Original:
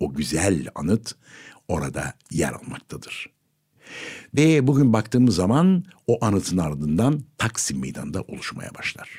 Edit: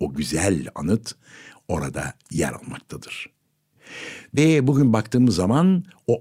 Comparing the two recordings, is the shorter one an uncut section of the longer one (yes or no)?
yes